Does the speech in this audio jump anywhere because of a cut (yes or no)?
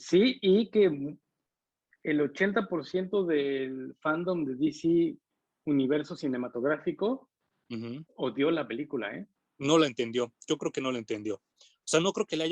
no